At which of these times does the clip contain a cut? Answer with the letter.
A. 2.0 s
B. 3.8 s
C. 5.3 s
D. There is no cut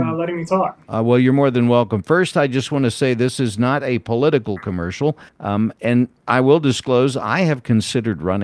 C